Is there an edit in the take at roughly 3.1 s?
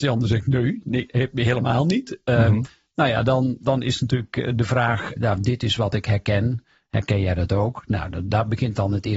no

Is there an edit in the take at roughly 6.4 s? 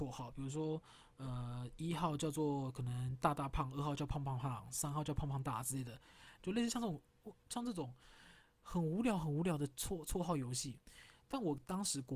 yes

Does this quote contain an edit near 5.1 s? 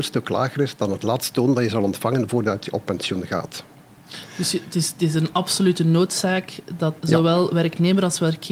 no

